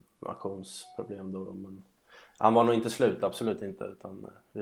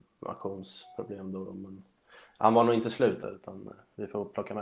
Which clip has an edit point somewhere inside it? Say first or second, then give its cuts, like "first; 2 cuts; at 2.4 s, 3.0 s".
second; 1 cut; at 3.2 s